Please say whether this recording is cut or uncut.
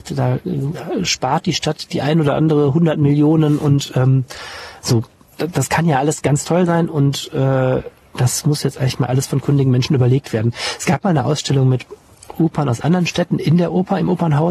uncut